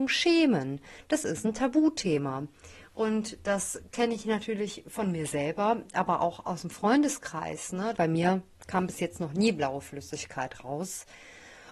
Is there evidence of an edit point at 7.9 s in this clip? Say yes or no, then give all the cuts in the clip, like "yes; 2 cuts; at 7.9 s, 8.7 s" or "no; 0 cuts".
yes; 1 cut; at 7.9 s